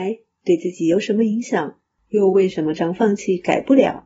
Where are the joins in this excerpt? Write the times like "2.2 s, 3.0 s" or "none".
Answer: 2.8 s